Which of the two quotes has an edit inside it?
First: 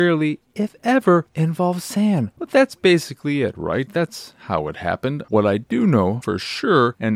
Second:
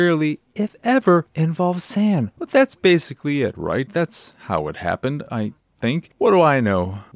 first; 1 cut; at 5.2 s

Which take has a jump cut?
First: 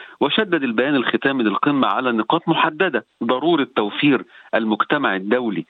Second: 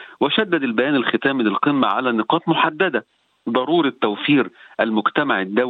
first; 1 cut; at 3.1 s

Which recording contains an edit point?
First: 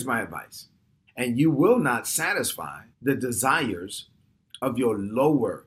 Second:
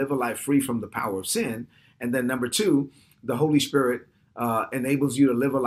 first; 2 cuts; at 1.1 s, 2.9 s

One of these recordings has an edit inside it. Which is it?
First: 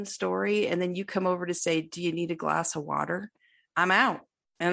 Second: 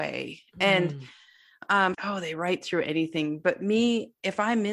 second; 1 cut; at 1.9 s

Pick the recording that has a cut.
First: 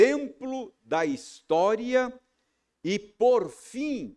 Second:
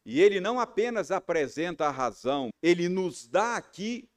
second; 1 cut; at 2.5 s

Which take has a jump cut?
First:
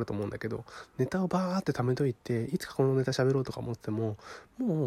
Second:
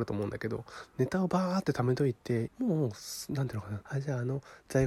second; 2 cuts; at 2.5 s, 3.8 s

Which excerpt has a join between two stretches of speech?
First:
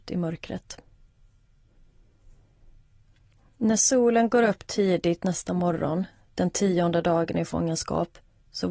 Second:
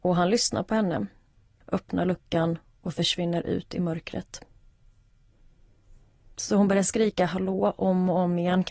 second; 2 cuts; at 1.6 s, 6.3 s

